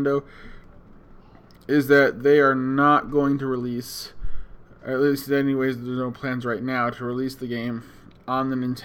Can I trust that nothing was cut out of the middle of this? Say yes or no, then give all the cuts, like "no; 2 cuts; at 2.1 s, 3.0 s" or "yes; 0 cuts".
yes; 0 cuts